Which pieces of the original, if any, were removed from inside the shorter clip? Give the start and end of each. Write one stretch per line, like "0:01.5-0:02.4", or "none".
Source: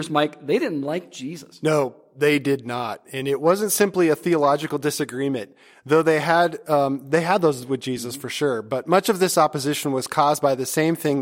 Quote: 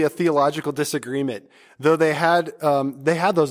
none